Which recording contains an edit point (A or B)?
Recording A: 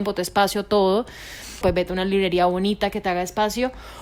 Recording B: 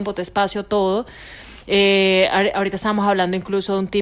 A